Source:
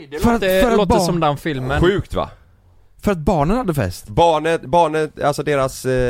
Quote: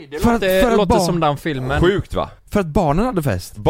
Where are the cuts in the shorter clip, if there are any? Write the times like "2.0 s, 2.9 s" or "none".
2.4 s

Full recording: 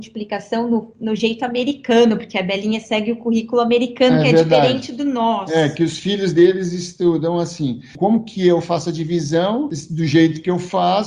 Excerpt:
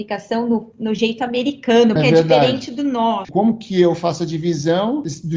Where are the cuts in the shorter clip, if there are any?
2.0 s, 3.2 s

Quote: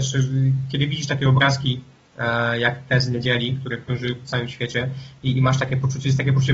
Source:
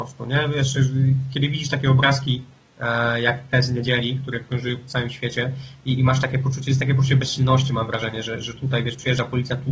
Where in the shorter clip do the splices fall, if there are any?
none

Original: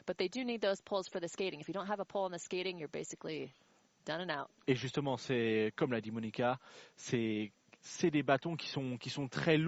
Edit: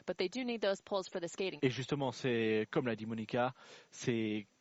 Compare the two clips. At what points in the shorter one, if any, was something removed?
1.6 s

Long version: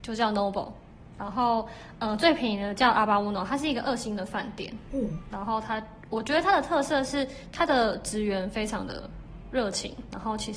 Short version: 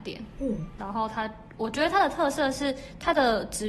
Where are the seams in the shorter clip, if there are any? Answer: none

